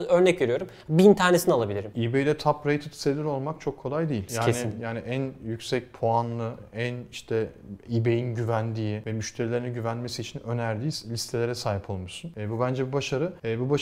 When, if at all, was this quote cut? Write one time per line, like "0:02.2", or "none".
0:01.9
0:04.8